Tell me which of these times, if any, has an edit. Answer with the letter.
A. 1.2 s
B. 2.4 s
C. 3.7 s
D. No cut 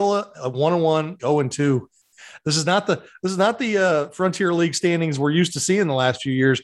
A